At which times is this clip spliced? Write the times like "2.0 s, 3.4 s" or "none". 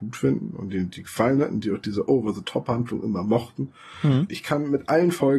4.3 s